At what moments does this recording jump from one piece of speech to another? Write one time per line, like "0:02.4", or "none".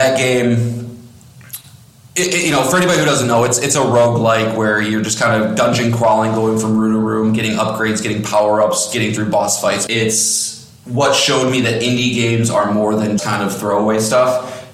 0:09.9
0:13.2

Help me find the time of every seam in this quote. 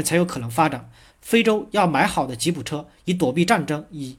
0:01.1

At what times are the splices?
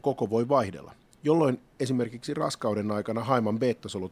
none

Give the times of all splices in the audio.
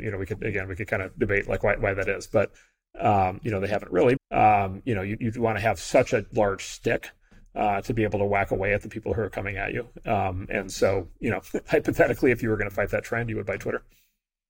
0:04.2

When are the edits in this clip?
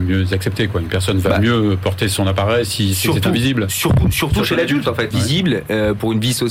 0:05.1

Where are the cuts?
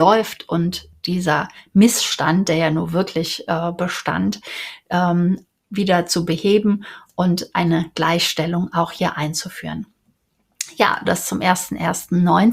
0:11.0

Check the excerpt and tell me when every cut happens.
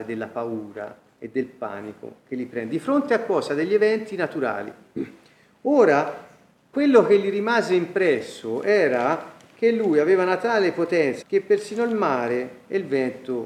0:06.7
0:11.2

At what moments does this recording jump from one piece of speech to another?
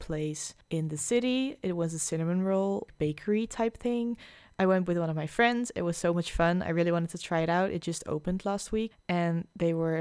0:08.9

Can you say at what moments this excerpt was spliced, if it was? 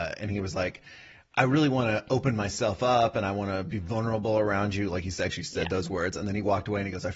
none

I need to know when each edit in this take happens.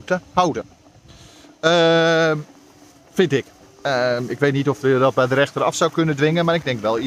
none

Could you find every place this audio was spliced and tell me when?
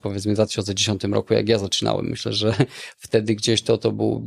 none

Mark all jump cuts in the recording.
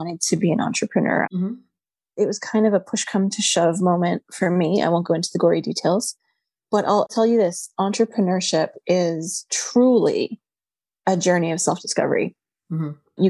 0:01.2

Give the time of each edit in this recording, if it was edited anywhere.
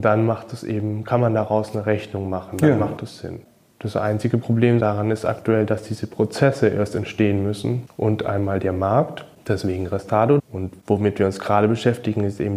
none

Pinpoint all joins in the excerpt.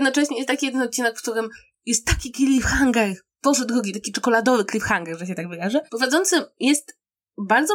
0:05.9

